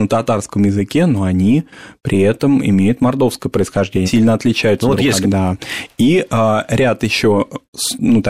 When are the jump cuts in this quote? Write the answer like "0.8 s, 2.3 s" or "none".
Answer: 4.1 s, 5.2 s